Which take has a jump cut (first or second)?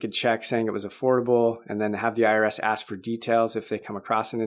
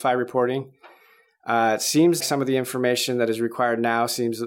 second